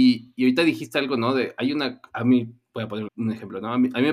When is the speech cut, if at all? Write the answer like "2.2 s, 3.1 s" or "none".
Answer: 3.1 s